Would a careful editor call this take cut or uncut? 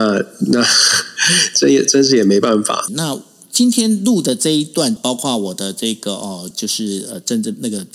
cut